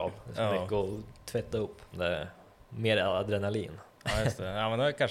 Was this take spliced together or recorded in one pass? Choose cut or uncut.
cut